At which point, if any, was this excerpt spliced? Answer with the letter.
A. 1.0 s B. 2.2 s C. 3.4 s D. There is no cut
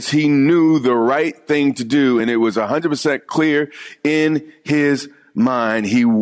D